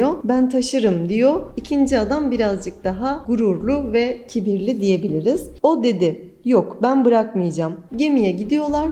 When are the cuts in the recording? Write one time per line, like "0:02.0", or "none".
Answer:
0:05.6
0:07.9